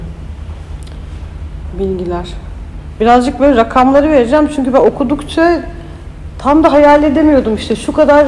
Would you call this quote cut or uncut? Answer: uncut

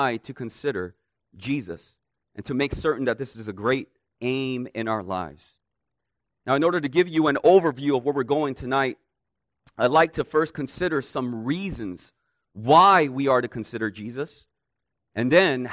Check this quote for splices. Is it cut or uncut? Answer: uncut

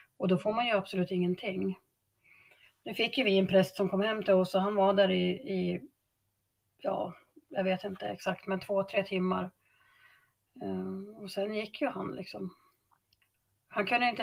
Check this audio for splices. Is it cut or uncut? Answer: uncut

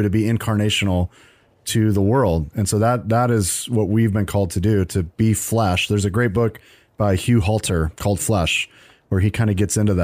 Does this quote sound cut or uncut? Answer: uncut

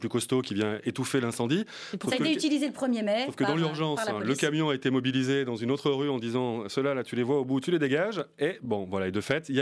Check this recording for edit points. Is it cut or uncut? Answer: uncut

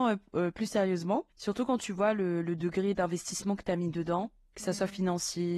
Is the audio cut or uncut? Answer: cut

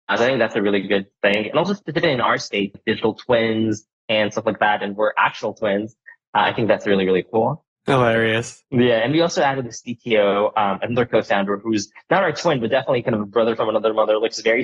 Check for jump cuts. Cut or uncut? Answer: cut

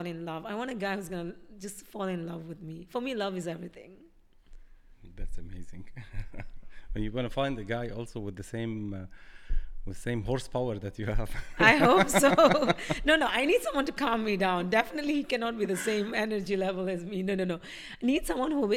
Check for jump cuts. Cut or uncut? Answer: uncut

